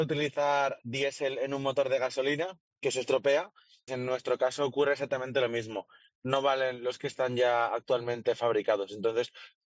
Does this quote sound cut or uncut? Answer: cut